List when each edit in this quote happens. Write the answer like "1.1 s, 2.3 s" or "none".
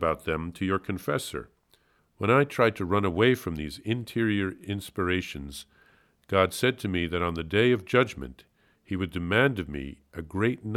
2.0 s

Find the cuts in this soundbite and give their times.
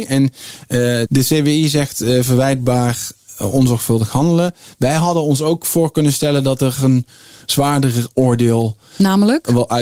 1.1 s

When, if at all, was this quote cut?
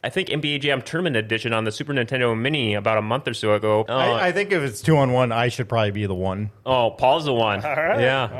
3.9 s

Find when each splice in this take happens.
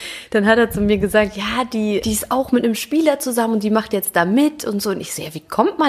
2.0 s

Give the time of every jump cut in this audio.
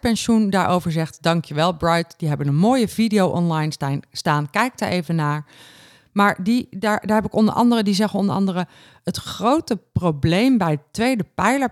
none

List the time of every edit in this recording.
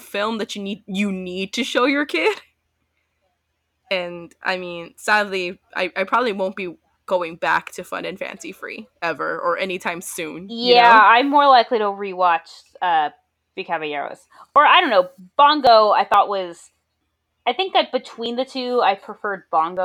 none

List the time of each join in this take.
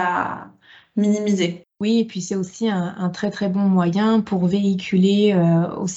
1.7 s

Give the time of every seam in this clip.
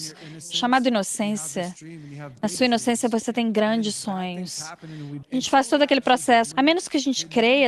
5.2 s, 6.5 s

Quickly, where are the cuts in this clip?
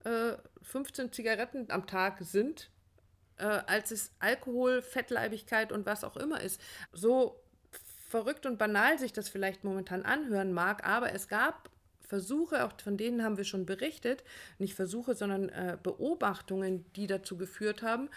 6.9 s

